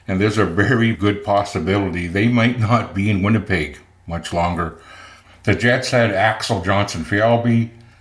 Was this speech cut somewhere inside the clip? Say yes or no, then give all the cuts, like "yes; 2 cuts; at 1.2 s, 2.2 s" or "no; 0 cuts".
yes; 2 cuts; at 0.9 s, 5.2 s